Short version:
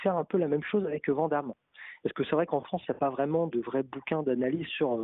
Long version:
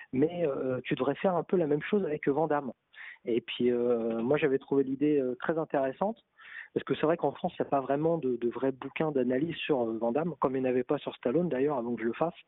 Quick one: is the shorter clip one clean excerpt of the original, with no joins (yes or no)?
no